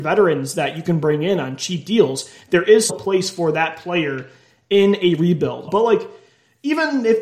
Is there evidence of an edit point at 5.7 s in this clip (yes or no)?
yes